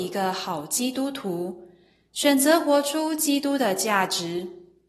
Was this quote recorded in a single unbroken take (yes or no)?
yes